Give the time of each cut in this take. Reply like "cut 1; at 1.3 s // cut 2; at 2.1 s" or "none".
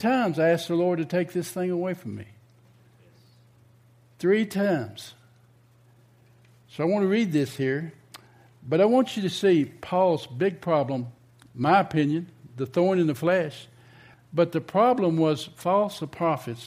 cut 1; at 14.1 s